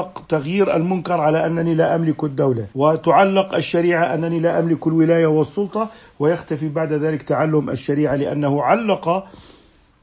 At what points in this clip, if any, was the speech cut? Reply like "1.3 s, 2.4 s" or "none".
2.7 s